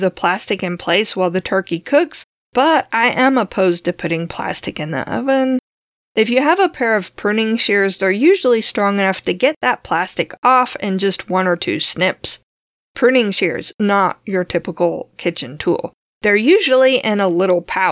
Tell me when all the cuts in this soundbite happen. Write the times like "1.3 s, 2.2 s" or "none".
16.1 s